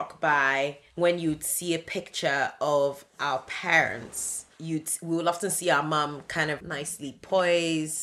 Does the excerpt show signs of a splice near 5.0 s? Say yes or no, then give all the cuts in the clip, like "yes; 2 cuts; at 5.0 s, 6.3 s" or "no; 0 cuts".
no; 1 cut; at 6.6 s